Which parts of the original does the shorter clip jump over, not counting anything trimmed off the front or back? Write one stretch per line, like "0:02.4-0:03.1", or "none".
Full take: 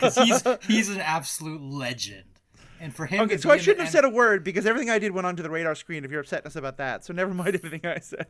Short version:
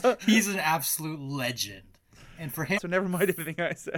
0:03.2-0:07.0